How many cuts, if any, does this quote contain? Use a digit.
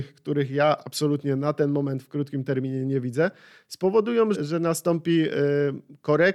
1